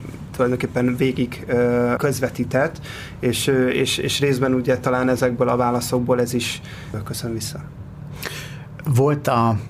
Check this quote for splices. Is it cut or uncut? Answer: cut